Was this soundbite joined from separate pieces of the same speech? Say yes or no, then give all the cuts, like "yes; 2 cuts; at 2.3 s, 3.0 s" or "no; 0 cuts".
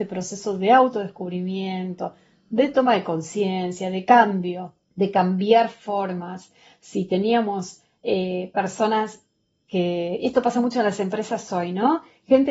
yes; 1 cut; at 4.8 s